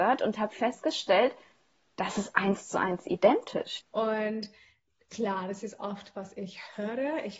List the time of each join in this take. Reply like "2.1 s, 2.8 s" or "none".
3.8 s